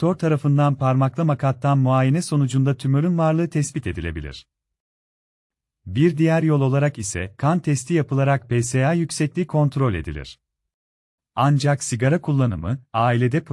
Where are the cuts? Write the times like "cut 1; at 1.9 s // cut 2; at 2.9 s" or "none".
cut 1; at 11.2 s